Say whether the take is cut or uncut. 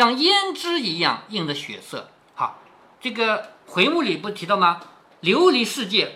uncut